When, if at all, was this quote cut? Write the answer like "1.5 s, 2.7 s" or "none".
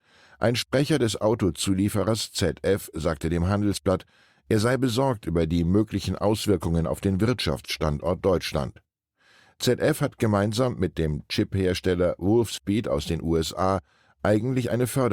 none